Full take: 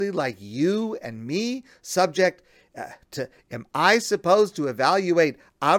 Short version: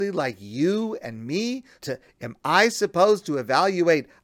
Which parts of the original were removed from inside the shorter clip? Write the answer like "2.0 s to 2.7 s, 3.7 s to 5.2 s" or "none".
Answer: 1.8 s to 3.1 s